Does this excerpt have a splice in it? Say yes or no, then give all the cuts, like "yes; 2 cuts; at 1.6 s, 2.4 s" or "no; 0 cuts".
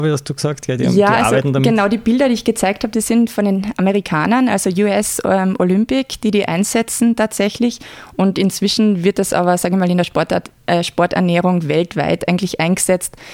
no; 0 cuts